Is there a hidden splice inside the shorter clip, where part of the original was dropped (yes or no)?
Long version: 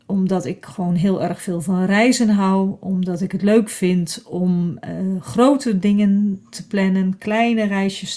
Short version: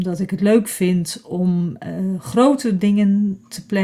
no